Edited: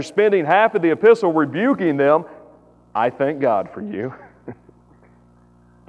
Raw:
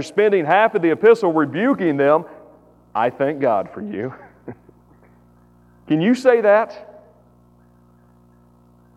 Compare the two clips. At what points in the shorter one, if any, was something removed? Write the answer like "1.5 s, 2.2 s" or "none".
none